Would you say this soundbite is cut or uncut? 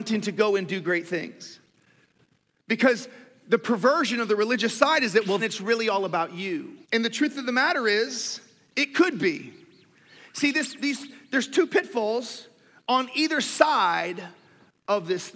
cut